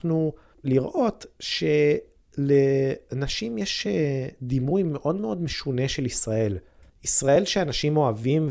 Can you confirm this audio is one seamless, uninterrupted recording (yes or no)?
yes